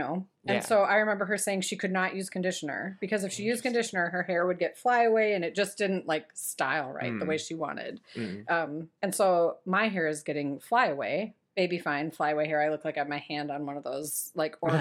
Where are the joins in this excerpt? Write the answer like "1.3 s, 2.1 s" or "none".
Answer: none